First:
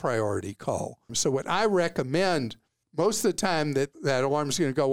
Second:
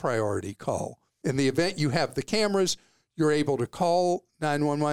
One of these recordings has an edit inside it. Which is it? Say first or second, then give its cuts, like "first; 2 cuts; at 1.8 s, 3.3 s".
first; 1 cut; at 1.1 s